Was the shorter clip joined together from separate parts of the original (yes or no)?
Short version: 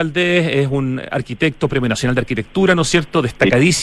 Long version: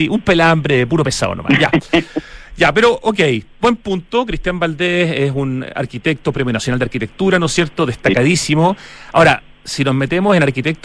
no